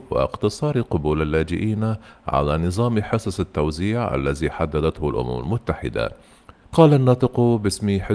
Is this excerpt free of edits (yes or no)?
no